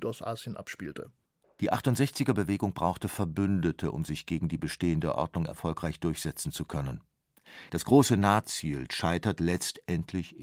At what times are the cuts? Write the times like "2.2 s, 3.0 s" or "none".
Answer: 1.4 s, 7.7 s, 8.9 s